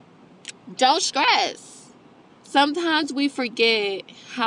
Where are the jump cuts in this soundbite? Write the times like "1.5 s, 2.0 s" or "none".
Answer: 2.3 s